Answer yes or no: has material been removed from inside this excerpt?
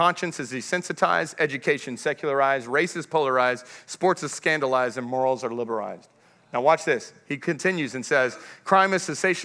no